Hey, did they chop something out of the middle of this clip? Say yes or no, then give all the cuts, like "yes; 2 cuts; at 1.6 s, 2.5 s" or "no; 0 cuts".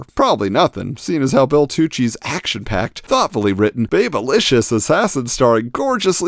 no; 0 cuts